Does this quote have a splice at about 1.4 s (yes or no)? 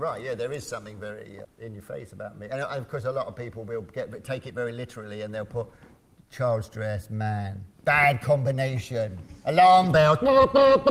yes